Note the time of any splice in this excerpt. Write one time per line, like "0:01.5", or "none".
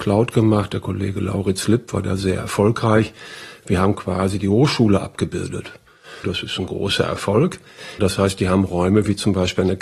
0:06.2
0:08.0